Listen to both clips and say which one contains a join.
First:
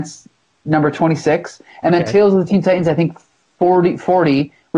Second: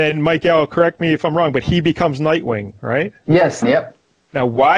second; 1 cut; at 3.6 s

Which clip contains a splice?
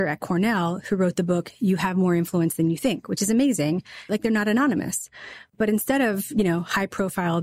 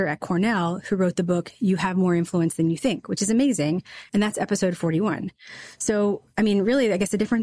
first; 1 cut; at 4.1 s

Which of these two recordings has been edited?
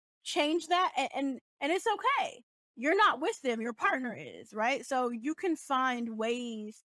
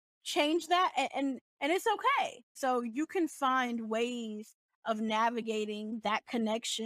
second; 1 cut; at 2.6 s

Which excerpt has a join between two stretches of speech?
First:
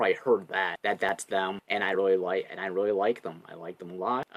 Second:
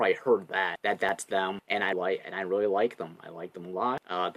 second; 1 cut; at 1.9 s

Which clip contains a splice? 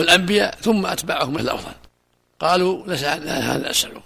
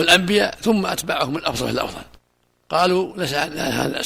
first; 1 cut; at 1.4 s

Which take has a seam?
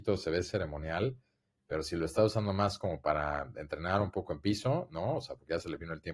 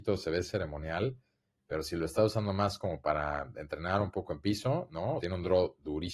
second; 1 cut; at 5.2 s

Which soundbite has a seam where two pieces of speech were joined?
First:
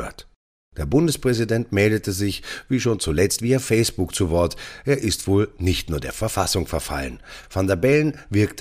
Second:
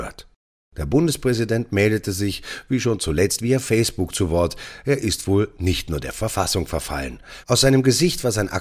second; 1 cut; at 7.4 s

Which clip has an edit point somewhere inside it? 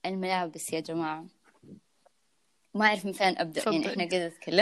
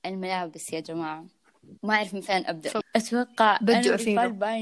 second; 2 cuts; at 1.8 s, 2.8 s

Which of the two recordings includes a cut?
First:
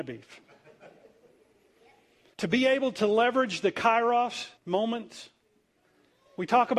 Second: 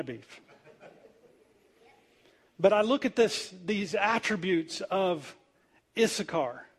first; 2 cuts; at 2.3 s, 4.6 s

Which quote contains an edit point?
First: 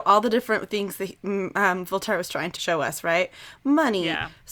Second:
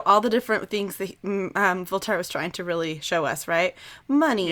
first; 1 cut; at 2.6 s

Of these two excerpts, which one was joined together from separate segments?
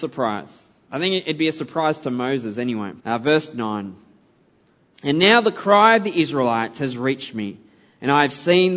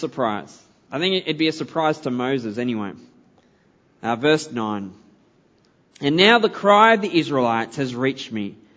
first; 1 cut; at 3.0 s

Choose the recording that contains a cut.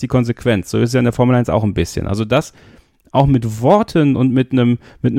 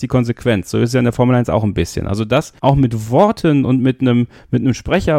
second; 1 cut; at 2.6 s

